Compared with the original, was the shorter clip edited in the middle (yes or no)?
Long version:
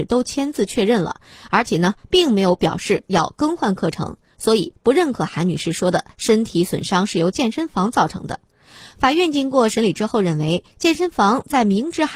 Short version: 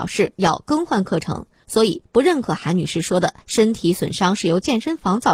no